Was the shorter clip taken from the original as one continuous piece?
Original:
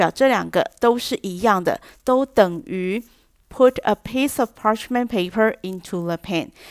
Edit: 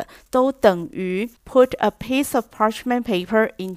no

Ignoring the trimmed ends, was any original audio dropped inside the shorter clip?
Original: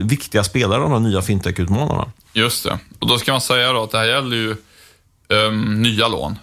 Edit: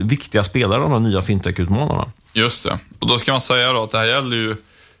no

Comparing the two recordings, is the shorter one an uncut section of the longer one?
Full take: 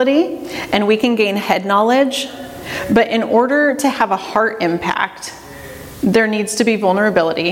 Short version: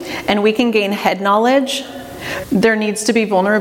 no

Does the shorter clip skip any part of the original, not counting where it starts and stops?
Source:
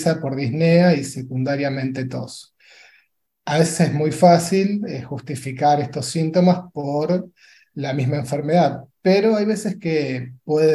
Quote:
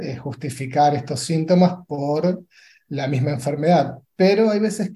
no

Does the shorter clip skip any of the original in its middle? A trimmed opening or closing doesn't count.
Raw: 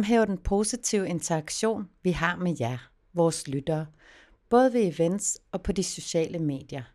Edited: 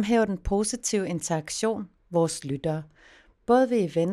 yes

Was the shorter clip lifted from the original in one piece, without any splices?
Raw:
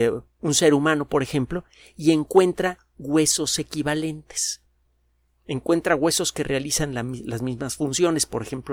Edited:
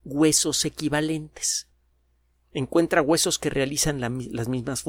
yes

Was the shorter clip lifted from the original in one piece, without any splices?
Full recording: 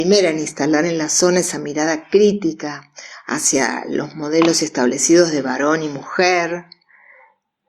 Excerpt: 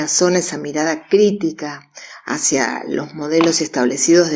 yes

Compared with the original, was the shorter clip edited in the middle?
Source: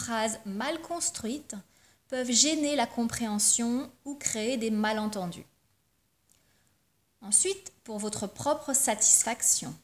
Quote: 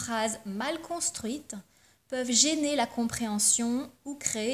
no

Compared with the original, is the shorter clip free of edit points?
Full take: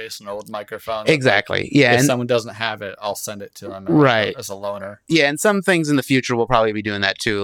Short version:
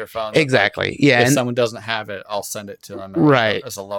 yes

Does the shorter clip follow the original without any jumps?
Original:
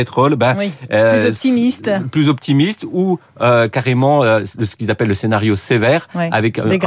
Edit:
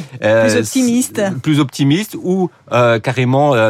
yes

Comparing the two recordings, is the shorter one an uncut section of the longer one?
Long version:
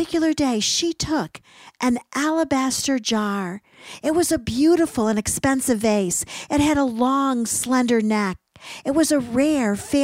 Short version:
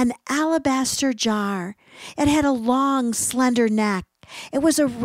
no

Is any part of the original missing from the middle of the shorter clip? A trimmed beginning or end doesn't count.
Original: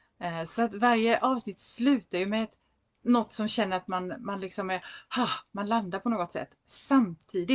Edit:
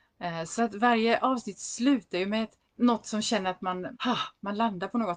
yes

